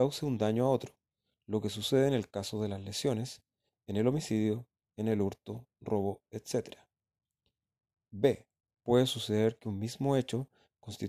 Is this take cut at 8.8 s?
yes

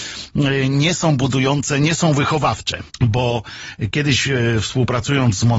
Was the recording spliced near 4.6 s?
no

